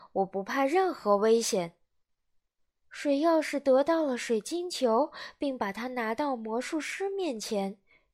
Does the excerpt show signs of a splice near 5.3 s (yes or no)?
no